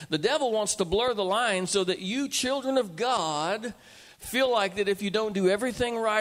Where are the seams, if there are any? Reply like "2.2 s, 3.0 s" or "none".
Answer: none